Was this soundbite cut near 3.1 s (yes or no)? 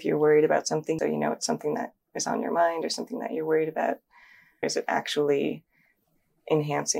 no